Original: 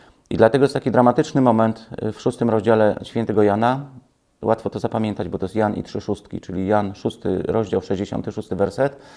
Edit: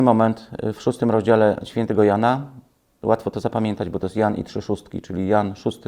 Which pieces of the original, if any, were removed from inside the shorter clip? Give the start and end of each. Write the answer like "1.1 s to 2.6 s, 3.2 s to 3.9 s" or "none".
none